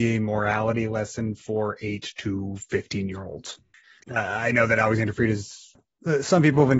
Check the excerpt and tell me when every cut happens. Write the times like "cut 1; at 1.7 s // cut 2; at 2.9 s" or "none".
cut 1; at 4.0 s

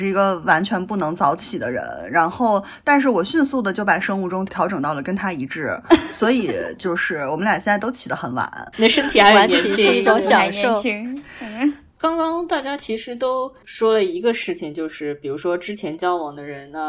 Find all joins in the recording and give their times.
cut 1; at 4.5 s // cut 2; at 8.7 s

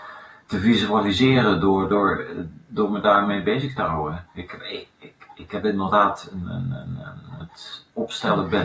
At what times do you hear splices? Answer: cut 1; at 7.4 s

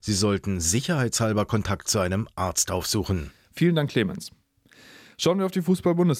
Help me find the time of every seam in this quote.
none

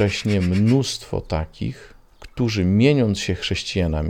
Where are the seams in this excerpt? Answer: none

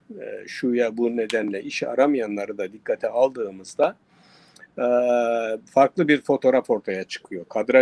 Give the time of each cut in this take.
none

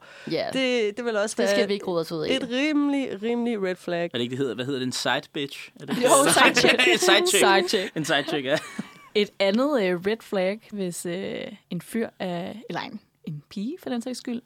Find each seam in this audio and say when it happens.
cut 1; at 10.7 s

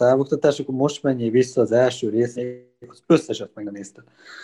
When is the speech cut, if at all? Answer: cut 1; at 2.4 s

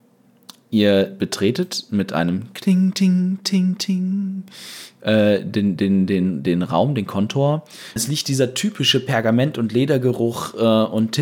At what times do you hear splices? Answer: cut 1; at 2.9 s // cut 2; at 8.0 s

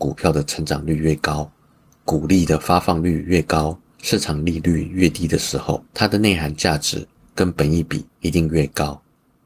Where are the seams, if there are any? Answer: cut 1; at 3.9 s // cut 2; at 5.9 s // cut 3; at 8.1 s

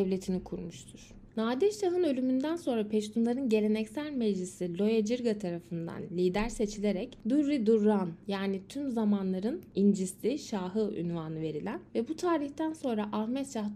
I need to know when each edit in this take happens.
cut 1; at 1.3 s

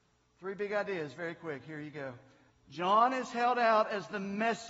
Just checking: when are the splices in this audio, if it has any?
cut 1; at 2.5 s

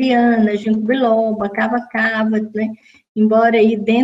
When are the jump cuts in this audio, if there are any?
cut 1; at 2.5 s

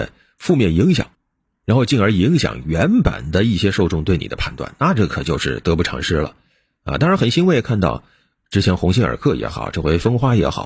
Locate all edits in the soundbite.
none

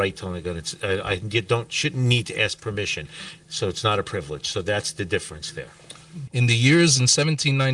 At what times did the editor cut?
cut 1; at 3.4 s // cut 2; at 6.3 s

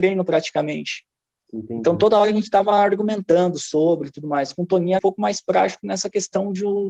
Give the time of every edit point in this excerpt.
cut 1; at 5.0 s

